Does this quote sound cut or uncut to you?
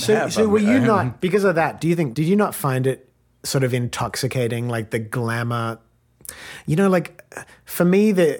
uncut